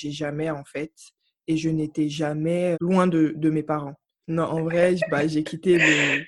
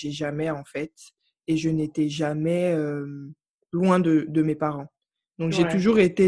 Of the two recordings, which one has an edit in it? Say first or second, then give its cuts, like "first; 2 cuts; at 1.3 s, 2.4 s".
first; 2 cuts; at 2.7 s, 4.2 s